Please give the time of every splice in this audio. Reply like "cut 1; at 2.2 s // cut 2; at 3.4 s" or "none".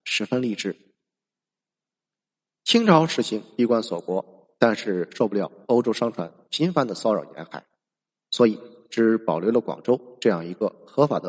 none